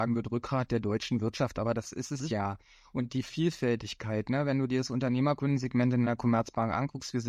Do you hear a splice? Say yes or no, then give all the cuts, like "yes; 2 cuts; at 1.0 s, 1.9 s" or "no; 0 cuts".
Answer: no; 0 cuts